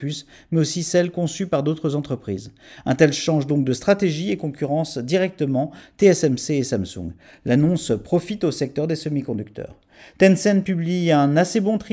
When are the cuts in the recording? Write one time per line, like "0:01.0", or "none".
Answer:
none